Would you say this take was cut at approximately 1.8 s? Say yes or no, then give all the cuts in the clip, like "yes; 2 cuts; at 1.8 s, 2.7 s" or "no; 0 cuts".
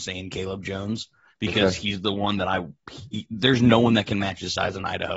no; 0 cuts